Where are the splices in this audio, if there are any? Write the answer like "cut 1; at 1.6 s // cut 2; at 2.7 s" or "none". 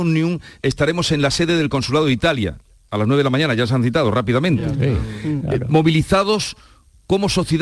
none